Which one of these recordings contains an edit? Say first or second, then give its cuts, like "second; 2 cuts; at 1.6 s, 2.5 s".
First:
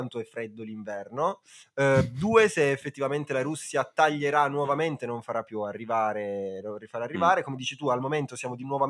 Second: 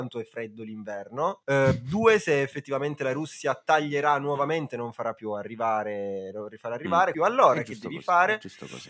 second; 2 cuts; at 1.4 s, 7.1 s